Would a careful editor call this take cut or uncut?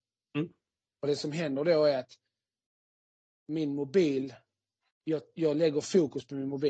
uncut